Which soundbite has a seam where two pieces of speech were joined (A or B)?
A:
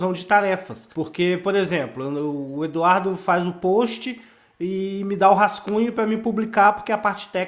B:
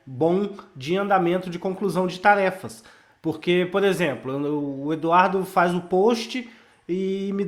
A